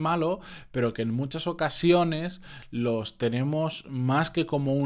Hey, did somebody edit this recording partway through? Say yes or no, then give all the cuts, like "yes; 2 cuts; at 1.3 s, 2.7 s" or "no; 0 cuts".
no; 0 cuts